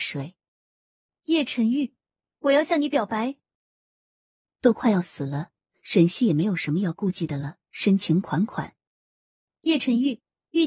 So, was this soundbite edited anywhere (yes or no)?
no